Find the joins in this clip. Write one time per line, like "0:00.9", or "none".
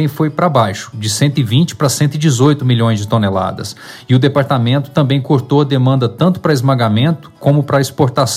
none